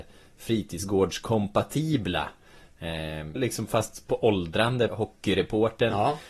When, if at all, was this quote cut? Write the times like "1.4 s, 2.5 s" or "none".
3.4 s, 4.9 s